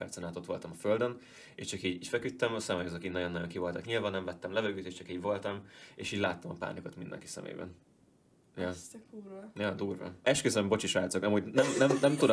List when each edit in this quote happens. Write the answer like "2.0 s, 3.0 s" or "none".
10.2 s